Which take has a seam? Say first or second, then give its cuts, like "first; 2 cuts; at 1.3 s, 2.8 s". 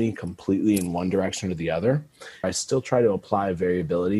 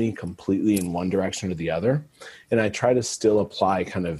first; 1 cut; at 2.4 s